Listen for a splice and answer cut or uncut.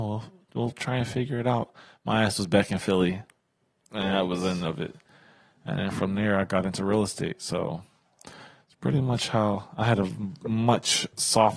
uncut